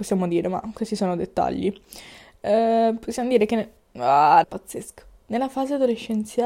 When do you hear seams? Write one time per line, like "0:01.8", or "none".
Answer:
0:04.4